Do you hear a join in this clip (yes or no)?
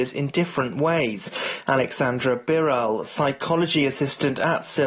no